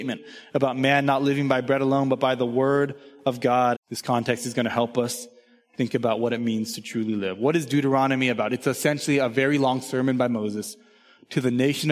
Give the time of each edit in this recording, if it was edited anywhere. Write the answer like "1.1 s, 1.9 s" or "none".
3.7 s